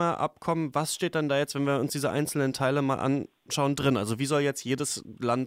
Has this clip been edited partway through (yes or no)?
no